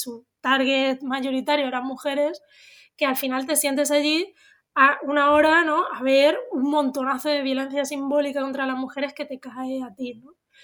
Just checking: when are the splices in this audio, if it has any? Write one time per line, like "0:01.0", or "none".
none

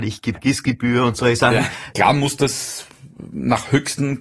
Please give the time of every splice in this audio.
0:01.9

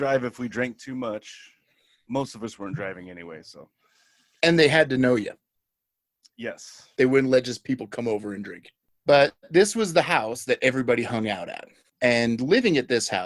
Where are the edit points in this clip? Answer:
none

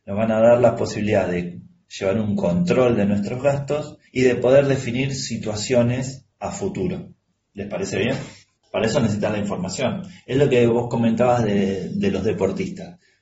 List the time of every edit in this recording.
0:08.6

